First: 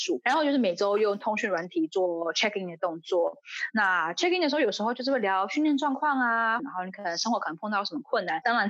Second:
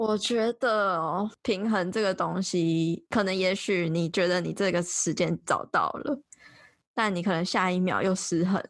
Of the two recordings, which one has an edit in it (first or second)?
first